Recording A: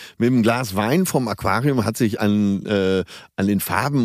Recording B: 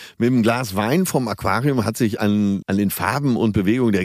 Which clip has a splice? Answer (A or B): B